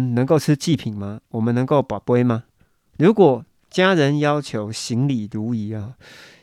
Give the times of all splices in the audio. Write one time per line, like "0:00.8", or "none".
none